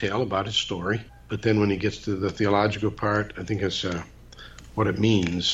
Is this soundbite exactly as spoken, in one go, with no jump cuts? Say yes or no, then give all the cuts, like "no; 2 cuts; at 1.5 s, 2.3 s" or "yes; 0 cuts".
no; 1 cut; at 1.1 s